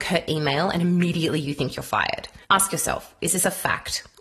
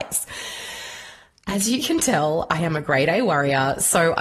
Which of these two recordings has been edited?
first; 1 cut; at 2.4 s

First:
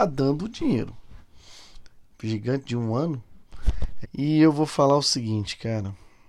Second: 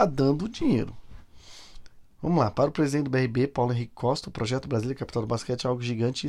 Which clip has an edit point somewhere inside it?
first; 2 cuts; at 2.1 s, 4.0 s

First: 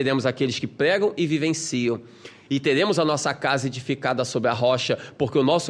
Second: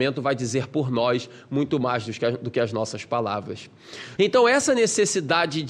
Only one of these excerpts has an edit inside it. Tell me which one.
second; 1 cut; at 4.2 s

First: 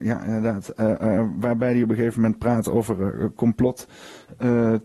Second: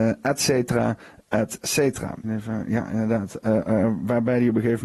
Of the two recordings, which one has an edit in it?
second; 1 cut; at 2.2 s

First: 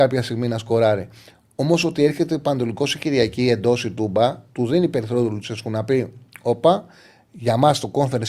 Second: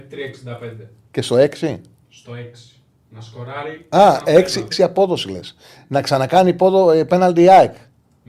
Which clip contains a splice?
second; 1 cut; at 4.7 s

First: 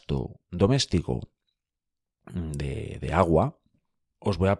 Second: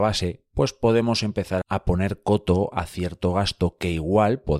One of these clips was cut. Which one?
second; 1 cut; at 1.6 s

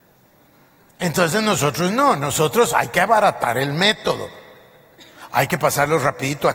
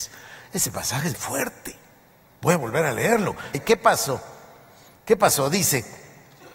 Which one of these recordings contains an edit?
second; 2 cuts; at 1.1 s, 3.5 s

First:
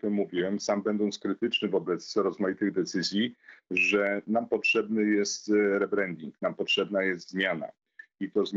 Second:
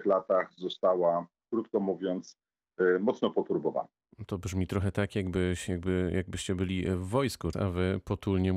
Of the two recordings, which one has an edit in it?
second; 1 cut; at 7.5 s

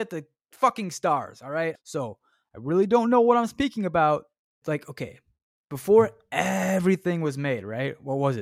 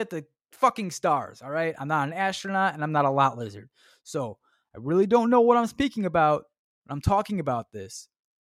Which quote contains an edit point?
first; 2 cuts; at 1.8 s, 4.6 s

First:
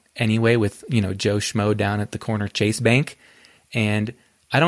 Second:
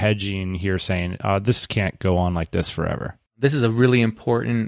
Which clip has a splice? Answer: second; 1 cut; at 3.3 s

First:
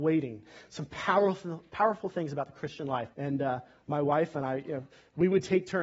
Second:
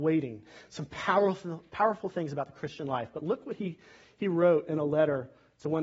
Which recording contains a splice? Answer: first; 1 cut; at 3.1 s

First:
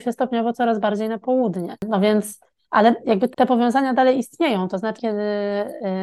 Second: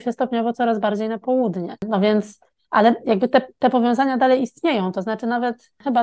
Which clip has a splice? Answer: first; 2 cuts; at 3.3 s, 5.0 s

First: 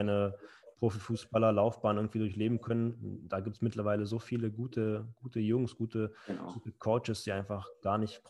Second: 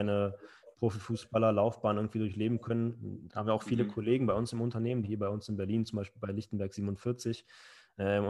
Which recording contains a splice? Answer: second; 2 cuts; at 3.3 s, 5.0 s

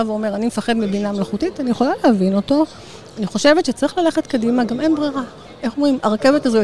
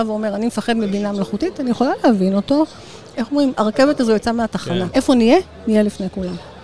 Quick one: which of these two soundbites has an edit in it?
second; 2 cuts; at 3.1 s, 4.9 s

